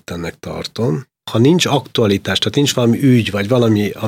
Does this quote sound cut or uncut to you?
uncut